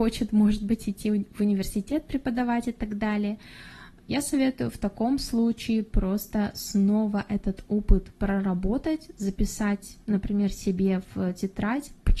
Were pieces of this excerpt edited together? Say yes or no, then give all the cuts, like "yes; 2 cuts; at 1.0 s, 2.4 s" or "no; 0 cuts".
yes; 1 cut; at 4.0 s